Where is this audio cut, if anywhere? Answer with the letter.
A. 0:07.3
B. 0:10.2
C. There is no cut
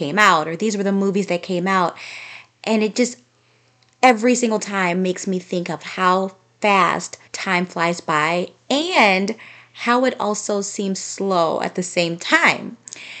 A